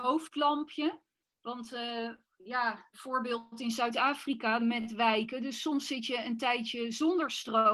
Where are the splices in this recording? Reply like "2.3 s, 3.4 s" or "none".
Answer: 2.9 s, 4.6 s